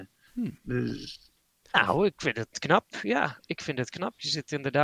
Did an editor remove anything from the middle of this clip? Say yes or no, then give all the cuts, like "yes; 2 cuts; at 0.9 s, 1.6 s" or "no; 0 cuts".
no; 0 cuts